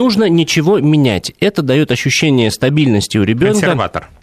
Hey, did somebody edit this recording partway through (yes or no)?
no